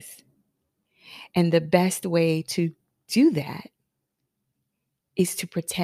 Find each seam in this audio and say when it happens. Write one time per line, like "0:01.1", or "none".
none